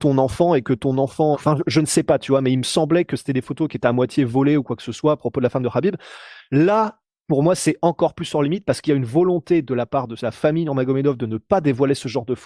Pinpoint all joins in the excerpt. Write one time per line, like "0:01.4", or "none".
0:01.3